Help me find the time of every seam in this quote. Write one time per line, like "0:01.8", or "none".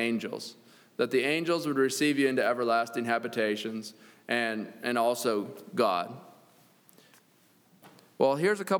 none